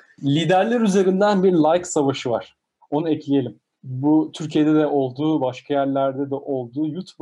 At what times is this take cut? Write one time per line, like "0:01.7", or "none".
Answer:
none